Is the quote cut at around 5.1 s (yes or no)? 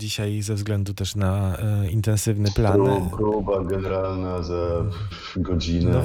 yes